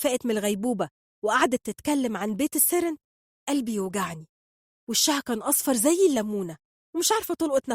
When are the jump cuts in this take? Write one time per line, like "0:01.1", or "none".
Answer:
none